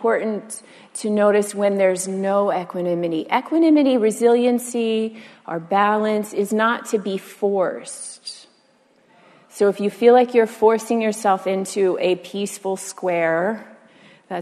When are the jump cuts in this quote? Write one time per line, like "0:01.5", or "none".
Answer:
none